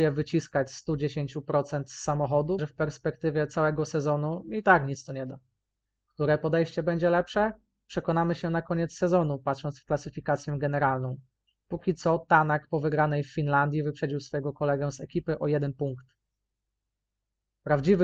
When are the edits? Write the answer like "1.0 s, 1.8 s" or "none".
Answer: 2.6 s